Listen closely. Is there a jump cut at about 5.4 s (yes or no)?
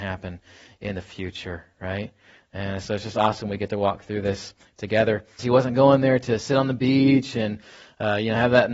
yes